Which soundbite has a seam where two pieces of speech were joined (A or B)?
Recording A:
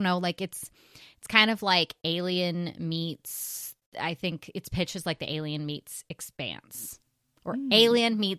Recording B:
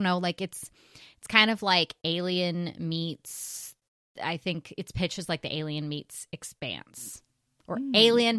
A